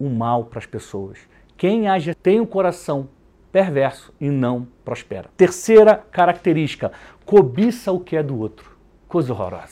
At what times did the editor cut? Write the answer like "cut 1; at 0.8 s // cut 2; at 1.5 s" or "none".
cut 1; at 2.1 s // cut 2; at 5.3 s

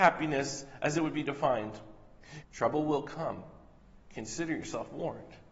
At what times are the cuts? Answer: cut 1; at 2.4 s

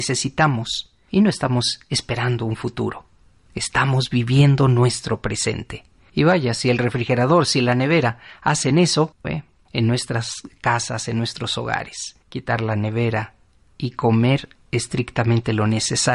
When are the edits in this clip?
cut 1; at 9.2 s

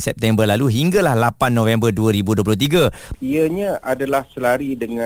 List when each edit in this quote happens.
cut 1; at 3.1 s

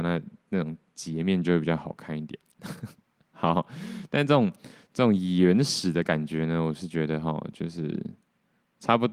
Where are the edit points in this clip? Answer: none

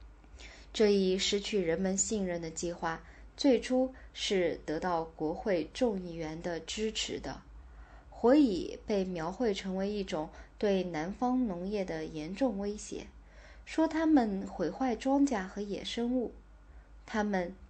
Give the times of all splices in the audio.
none

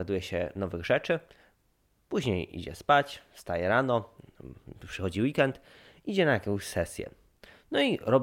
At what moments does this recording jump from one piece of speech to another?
none

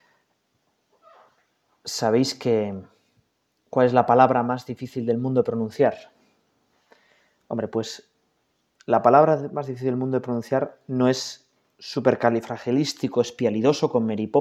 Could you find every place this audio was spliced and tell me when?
none

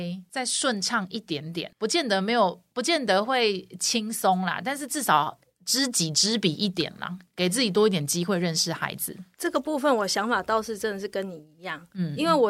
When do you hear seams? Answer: none

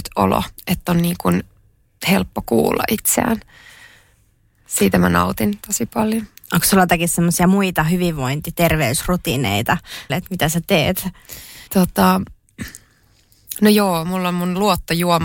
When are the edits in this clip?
cut 1; at 10.1 s // cut 2; at 11.7 s

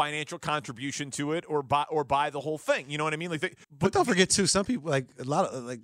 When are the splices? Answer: cut 1; at 3.6 s

